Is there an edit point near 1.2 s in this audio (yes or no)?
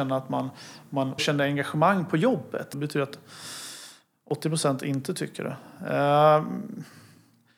yes